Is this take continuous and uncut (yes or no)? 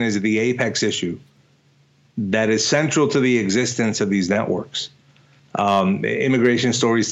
yes